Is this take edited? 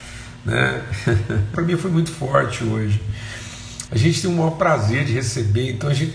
yes; 2 cuts; at 1.5 s, 3.9 s

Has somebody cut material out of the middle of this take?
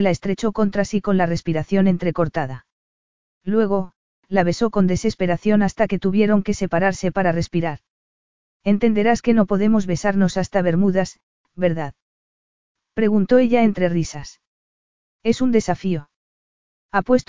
no; 0 cuts

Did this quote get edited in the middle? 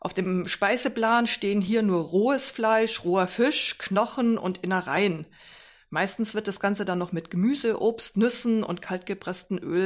no; 0 cuts

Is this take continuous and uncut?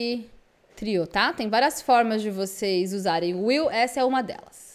yes; 0 cuts

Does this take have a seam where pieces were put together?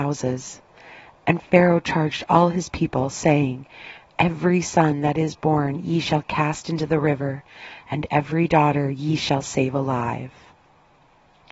no; 0 cuts

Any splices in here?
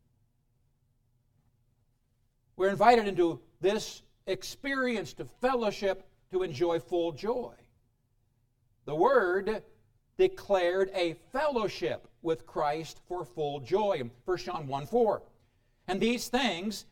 no; 0 cuts

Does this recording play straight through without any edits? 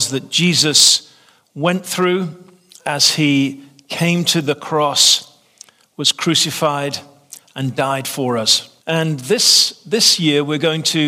no; 1 cut; at 8.8 s

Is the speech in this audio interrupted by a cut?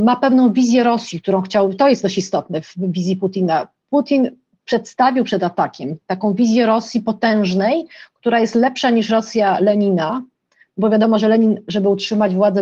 no; 0 cuts

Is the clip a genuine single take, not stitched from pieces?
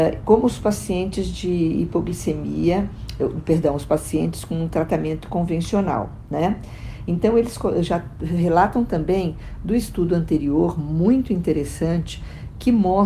yes; 0 cuts

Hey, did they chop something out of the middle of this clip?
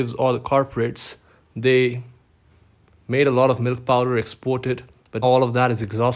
yes; 1 cut; at 5.2 s

